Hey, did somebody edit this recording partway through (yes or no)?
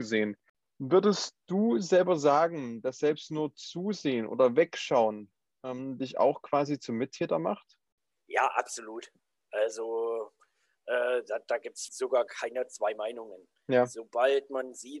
yes